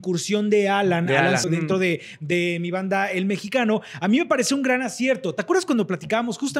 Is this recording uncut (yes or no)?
no